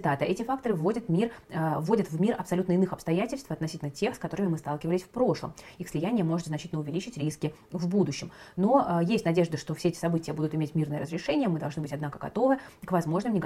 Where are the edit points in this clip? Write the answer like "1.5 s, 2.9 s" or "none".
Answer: none